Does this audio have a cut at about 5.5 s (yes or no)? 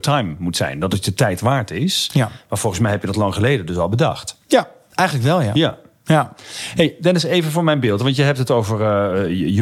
no